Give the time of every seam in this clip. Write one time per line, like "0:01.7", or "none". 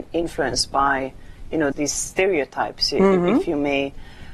0:01.7